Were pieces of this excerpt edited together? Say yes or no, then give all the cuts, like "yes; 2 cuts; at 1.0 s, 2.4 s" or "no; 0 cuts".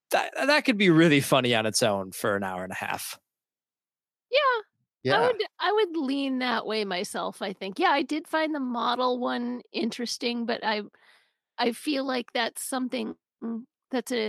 no; 0 cuts